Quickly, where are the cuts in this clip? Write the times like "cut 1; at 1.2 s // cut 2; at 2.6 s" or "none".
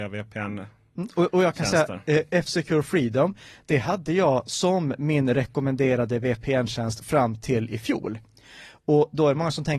none